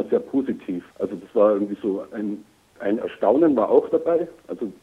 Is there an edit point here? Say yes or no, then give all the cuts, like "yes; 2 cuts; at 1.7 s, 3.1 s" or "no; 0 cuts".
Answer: yes; 2 cuts; at 0.9 s, 2.8 s